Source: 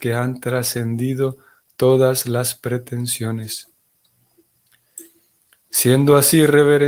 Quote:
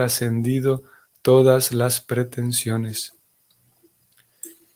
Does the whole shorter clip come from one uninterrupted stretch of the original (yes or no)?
yes